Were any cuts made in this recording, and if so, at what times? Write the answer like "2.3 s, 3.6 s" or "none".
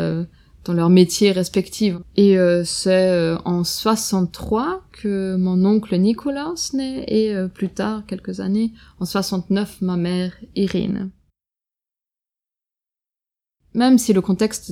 2.0 s